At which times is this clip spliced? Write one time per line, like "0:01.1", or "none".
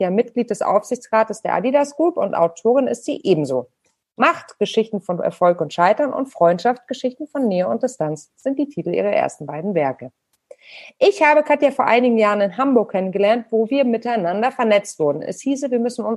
none